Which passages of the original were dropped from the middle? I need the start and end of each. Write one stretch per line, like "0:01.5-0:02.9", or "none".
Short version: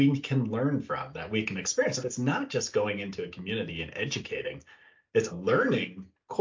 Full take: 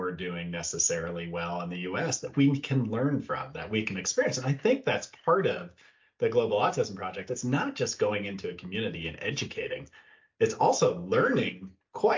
0:04.4-0:07.3
0:10.6-0:10.9